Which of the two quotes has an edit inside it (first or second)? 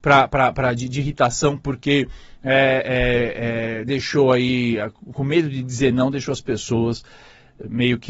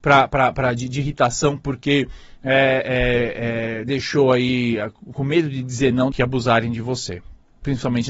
second